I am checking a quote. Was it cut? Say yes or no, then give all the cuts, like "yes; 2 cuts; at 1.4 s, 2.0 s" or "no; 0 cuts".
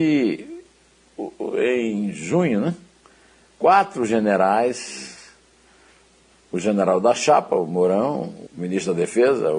yes; 1 cut; at 8.5 s